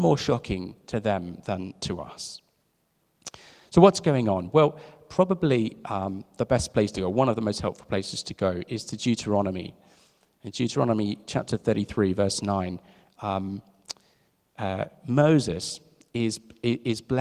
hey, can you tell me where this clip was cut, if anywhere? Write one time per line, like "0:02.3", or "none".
none